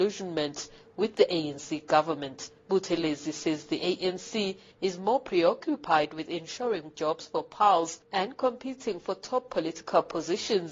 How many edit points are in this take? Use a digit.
2